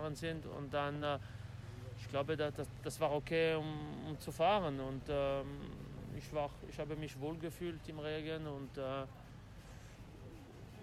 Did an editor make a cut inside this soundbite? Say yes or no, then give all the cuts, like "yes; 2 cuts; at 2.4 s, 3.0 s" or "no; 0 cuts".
no; 0 cuts